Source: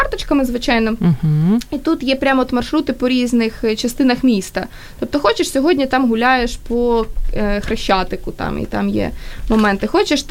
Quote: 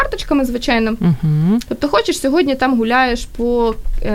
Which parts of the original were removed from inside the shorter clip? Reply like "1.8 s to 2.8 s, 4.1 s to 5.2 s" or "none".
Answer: 1.7 s to 5.0 s